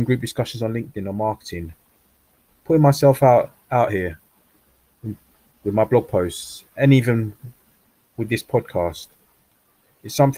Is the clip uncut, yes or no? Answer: yes